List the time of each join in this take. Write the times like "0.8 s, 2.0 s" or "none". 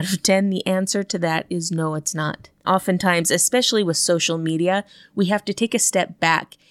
2.6 s